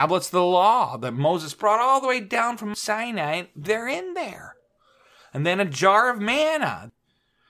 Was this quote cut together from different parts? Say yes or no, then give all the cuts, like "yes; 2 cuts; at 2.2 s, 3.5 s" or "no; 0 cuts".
no; 0 cuts